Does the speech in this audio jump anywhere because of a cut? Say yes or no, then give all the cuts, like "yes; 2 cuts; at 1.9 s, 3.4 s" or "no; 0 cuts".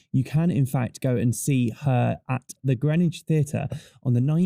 yes; 1 cut; at 2.6 s